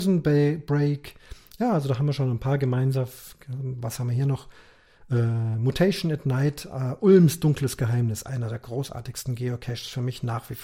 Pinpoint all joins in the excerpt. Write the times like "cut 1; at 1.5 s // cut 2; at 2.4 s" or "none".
none